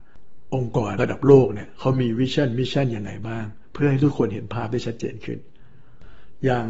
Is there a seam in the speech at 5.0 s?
no; 1 cut; at 1.0 s

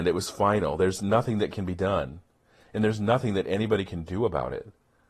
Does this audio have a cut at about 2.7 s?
no; 0 cuts

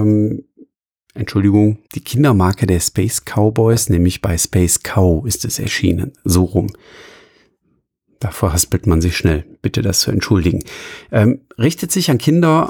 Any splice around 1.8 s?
yes; 1 cut; at 1.8 s

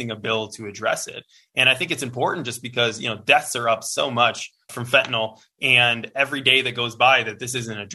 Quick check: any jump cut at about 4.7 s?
yes; 1 cut; at 4.7 s

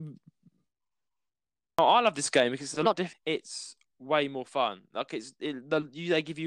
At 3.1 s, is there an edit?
yes; 1 cut; at 3.1 s

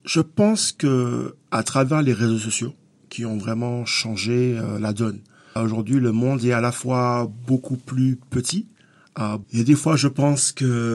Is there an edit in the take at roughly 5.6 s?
yes; 2 cuts; at 5.6 s, 9.4 s

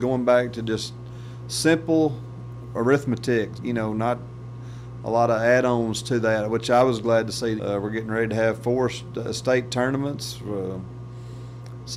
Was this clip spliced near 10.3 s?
no; 2 cuts; at 3.6 s, 7.6 s

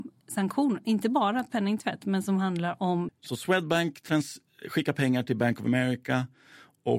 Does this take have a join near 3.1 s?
yes; 1 cut; at 3.1 s

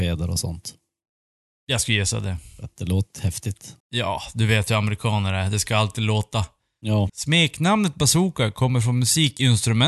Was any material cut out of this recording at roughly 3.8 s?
yes; 2 cuts; at 3.8 s, 7.1 s

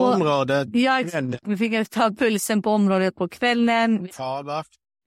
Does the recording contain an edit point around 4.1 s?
yes; 2 cuts; at 1.4 s, 4.1 s

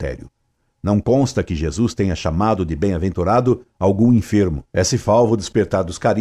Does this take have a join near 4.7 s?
yes; 1 cut; at 4.7 s

